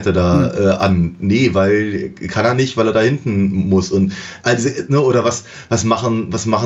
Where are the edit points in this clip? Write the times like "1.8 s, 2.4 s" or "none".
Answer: none